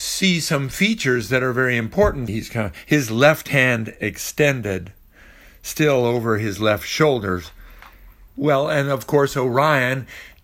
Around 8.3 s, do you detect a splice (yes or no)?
yes